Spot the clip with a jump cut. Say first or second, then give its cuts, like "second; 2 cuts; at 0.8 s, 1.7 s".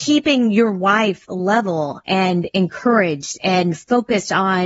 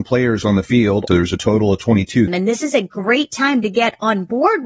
second; 2 cuts; at 1.1 s, 2.3 s